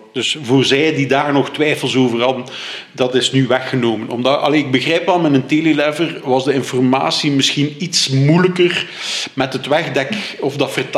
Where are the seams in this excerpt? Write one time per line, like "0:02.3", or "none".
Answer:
none